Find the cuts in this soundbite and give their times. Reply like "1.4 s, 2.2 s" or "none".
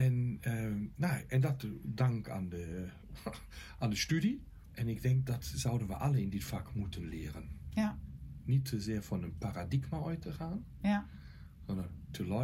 4.7 s